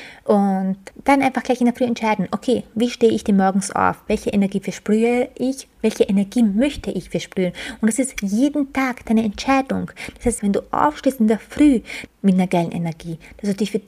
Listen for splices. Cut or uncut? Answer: cut